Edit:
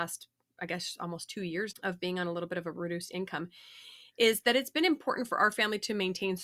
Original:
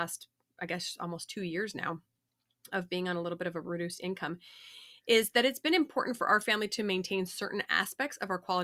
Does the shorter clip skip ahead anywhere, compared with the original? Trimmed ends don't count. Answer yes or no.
yes